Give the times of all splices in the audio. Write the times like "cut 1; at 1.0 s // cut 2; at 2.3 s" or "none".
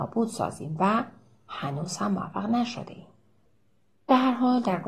none